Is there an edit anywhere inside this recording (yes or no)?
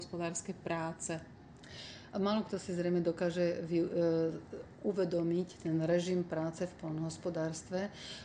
no